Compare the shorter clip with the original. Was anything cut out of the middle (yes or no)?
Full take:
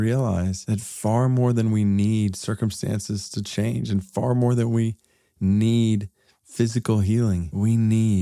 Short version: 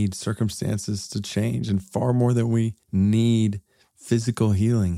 yes